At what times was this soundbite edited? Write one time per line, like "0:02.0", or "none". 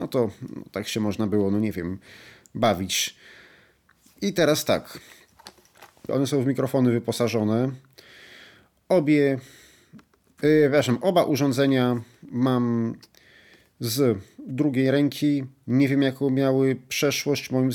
0:06.1